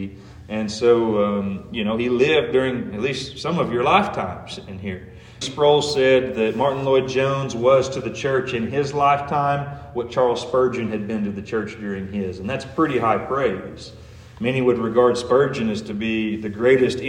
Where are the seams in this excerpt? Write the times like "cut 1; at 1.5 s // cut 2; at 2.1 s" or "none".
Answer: cut 1; at 5.4 s